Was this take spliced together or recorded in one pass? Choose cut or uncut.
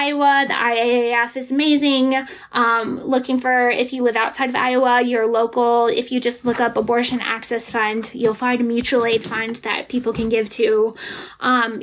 uncut